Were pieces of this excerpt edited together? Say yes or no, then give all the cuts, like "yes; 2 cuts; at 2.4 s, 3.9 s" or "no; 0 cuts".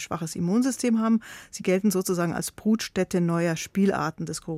no; 0 cuts